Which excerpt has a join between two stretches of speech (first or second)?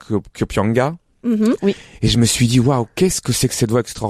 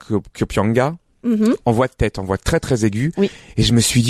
first